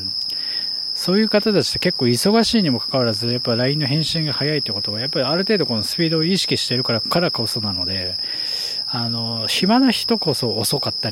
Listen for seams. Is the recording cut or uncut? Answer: cut